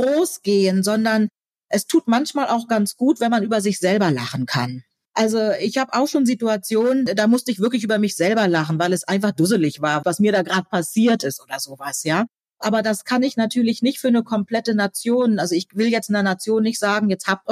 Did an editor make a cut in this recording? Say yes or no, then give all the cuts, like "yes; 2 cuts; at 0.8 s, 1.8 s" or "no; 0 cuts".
no; 0 cuts